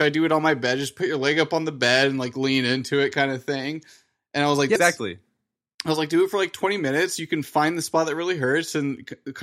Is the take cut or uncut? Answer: cut